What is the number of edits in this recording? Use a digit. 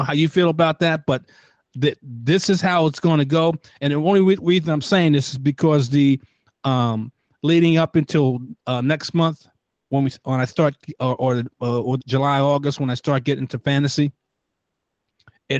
1